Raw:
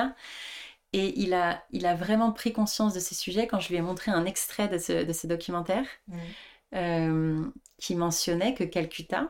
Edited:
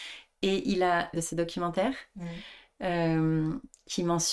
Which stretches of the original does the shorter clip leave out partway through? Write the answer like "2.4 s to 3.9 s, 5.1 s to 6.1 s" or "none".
1.6 s to 5.1 s